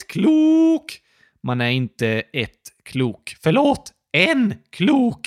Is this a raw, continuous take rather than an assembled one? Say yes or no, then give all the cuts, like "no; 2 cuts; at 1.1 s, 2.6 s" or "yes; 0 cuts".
yes; 0 cuts